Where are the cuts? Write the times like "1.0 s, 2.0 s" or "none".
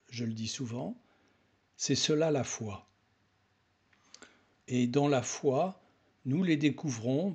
4.6 s